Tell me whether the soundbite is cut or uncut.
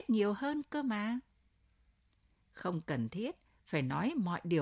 uncut